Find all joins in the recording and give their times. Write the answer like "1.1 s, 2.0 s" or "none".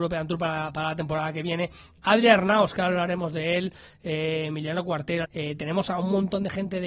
5.2 s